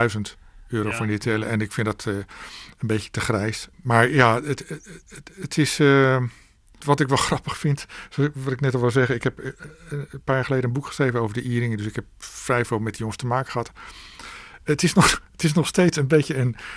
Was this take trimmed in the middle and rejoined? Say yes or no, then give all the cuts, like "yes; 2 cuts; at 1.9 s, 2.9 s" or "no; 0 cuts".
yes; 1 cut; at 6.8 s